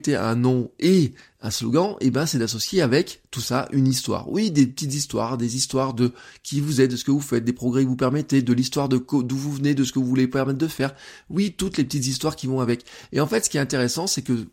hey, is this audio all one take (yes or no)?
yes